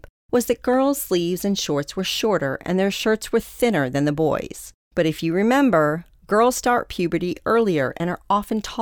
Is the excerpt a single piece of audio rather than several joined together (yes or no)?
no